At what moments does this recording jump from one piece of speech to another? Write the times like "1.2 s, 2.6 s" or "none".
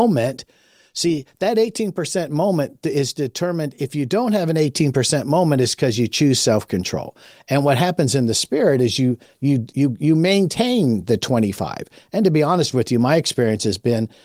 none

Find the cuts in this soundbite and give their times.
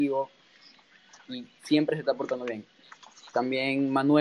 none

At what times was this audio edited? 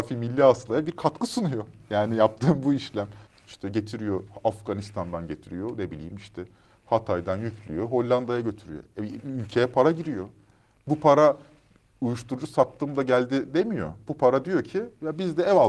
3.3 s

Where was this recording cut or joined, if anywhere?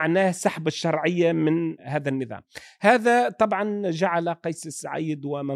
1.8 s

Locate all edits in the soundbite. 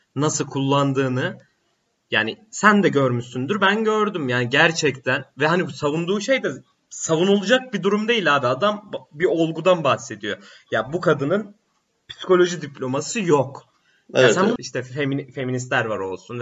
14.6 s

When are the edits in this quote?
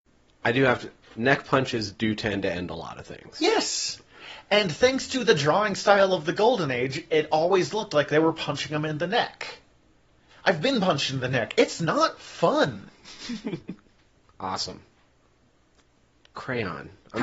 none

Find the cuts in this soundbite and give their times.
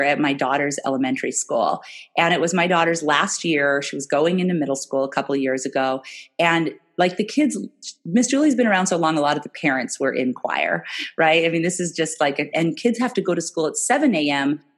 12.5 s

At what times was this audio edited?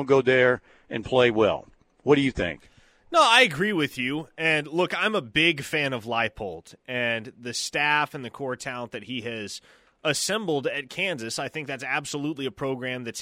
none

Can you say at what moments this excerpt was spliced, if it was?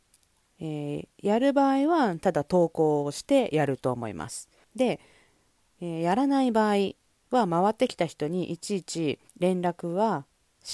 4.6 s, 9.3 s

